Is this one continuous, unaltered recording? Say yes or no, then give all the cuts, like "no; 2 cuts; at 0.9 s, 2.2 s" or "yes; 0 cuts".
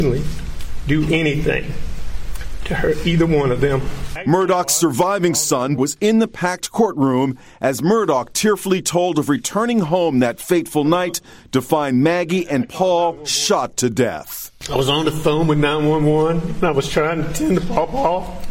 no; 1 cut; at 5.8 s